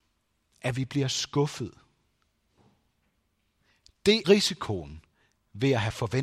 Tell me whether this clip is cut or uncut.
cut